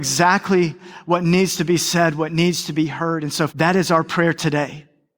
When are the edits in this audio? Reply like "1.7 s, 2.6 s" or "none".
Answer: 3.5 s